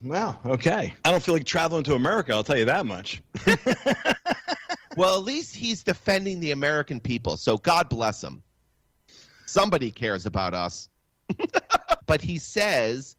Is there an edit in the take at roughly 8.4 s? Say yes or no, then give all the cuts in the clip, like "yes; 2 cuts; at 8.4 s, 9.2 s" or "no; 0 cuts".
no; 2 cuts; at 1.0 s, 12.0 s